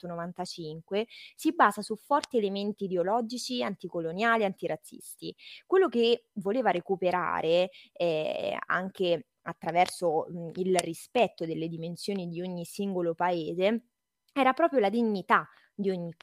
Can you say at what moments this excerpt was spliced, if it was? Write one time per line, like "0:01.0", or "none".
none